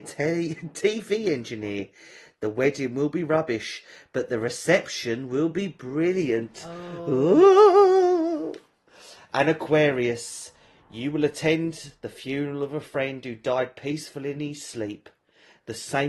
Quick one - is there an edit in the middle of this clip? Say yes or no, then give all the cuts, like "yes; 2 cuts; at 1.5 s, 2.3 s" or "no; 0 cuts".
no; 0 cuts